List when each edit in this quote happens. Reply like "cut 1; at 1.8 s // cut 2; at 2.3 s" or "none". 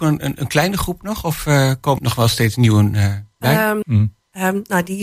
cut 1; at 2.0 s // cut 2; at 3.8 s